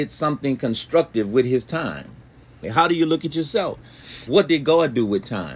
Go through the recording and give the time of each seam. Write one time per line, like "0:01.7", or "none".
0:02.6
0:04.3